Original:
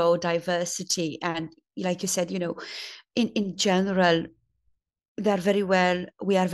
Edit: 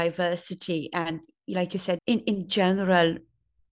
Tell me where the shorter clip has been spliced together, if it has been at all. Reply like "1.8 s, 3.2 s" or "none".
2.0 s